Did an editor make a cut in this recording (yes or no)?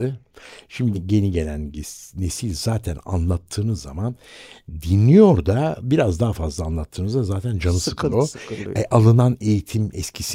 yes